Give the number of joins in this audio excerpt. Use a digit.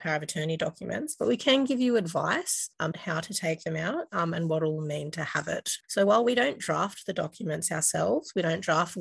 2